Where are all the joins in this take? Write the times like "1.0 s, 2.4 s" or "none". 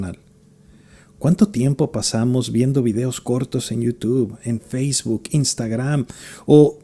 none